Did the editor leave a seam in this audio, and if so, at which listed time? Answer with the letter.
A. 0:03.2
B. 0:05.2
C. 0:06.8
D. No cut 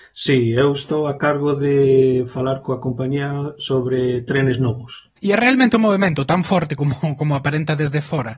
B